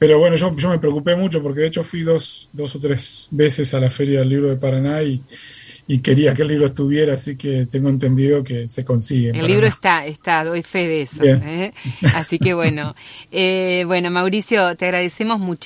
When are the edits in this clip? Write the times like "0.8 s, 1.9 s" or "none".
none